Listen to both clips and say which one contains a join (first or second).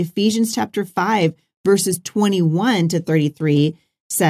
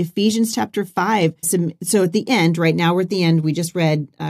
second